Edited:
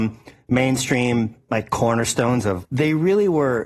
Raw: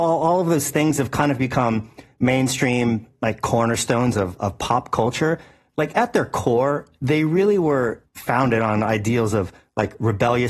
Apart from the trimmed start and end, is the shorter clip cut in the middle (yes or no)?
yes